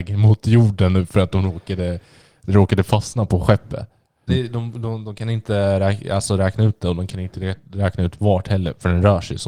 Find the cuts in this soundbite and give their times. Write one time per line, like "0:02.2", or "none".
0:04.3